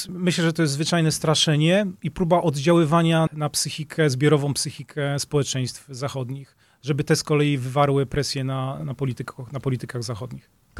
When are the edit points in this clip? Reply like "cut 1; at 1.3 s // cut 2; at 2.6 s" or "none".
cut 1; at 3.3 s